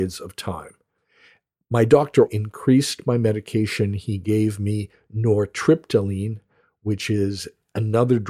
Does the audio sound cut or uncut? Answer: cut